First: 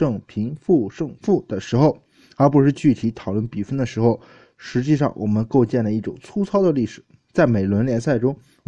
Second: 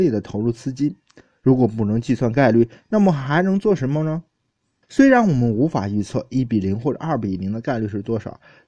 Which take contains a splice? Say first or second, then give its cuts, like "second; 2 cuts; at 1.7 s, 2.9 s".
second; 1 cut; at 4.8 s